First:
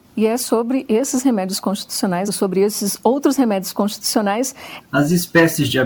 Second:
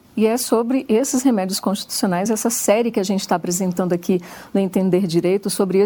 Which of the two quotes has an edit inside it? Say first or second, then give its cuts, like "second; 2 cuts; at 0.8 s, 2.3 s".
first; 2 cuts; at 2.3 s, 4.8 s